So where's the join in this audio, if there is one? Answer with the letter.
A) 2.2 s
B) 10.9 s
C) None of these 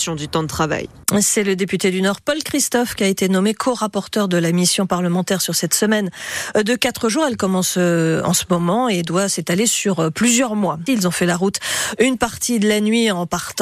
B